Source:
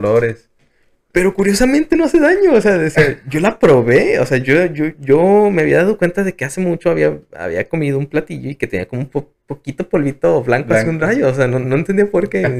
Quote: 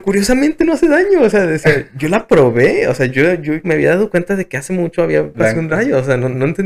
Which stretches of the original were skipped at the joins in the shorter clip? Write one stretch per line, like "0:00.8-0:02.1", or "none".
0:05.0-0:05.5
0:07.2-0:10.6

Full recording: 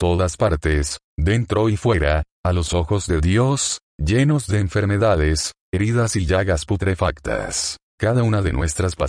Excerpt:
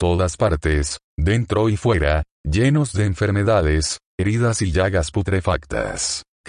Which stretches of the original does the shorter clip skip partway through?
0:02.3-0:03.9

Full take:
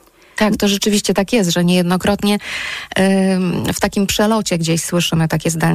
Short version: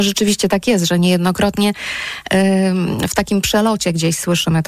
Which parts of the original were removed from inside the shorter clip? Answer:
none

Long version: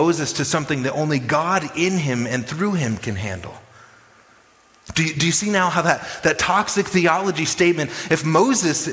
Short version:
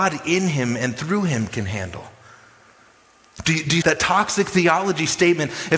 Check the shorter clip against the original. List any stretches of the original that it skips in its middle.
0:05.3-0:06.2

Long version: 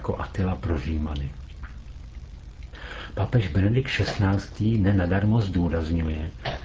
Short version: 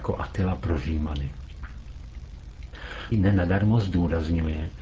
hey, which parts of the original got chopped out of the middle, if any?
0:03.1-0:04.7

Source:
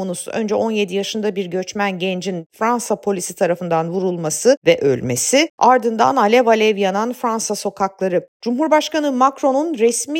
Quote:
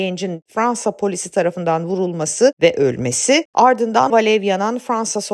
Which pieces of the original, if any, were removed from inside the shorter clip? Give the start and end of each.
0:06.1-0:06.4

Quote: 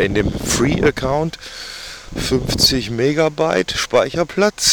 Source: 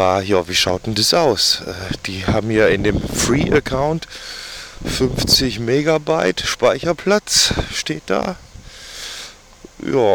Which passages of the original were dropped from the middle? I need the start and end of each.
none

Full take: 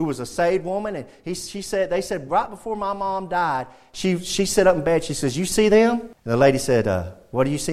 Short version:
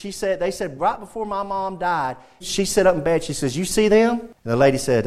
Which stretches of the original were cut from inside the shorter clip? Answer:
0:03.9-0:04.2

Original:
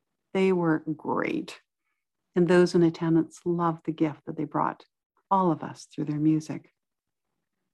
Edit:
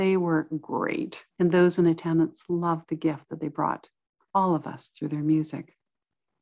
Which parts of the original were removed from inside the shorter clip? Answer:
0:01.7-0:02.3

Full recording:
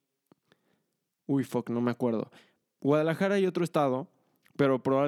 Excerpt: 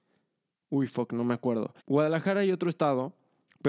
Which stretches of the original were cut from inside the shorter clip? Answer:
0:02.4-0:02.7

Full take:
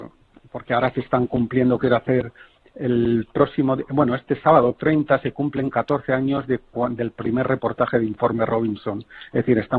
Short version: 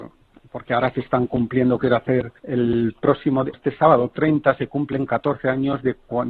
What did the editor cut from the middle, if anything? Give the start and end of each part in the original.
0:02.4-0:02.7
0:03.9-0:04.2

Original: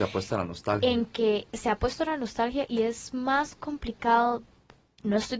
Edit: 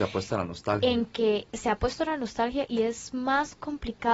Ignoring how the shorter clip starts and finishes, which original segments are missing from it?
none

